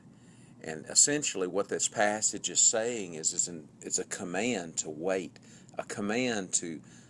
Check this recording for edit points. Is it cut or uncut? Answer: uncut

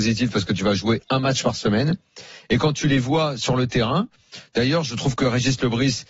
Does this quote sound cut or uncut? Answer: uncut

